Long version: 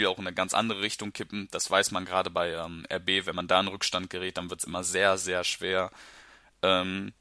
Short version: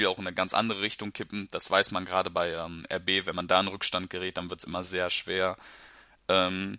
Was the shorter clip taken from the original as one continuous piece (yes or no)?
no